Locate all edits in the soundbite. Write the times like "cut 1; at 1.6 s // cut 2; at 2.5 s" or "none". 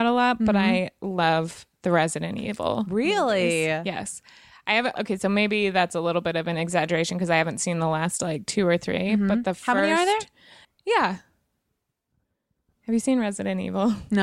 cut 1; at 5.0 s // cut 2; at 10.6 s